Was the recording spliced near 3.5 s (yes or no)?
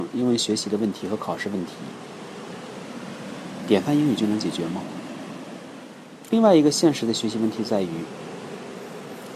no